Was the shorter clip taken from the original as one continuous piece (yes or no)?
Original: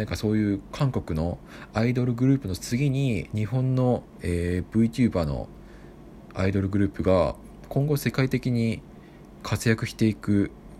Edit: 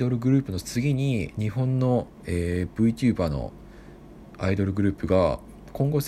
yes